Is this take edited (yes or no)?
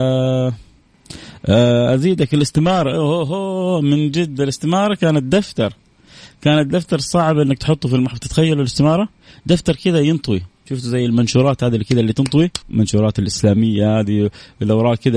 yes